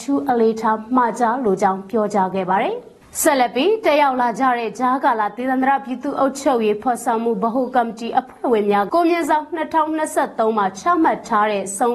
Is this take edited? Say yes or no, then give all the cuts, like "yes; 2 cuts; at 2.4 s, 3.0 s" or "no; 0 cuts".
yes; 1 cut; at 8.9 s